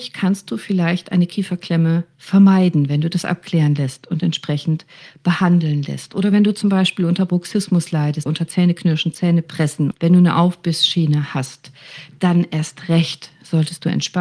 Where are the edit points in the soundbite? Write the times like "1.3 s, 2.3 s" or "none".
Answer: 8.3 s, 9.9 s